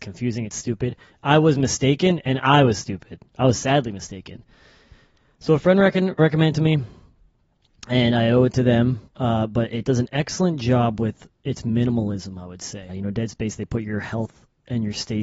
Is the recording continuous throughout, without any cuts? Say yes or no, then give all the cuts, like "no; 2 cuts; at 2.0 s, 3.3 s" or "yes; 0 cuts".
no; 3 cuts; at 6.2 s, 9.1 s, 12.9 s